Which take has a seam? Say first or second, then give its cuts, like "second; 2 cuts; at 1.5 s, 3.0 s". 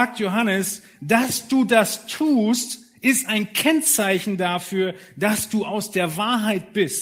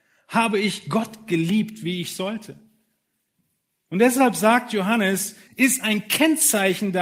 second; 1 cut; at 5.5 s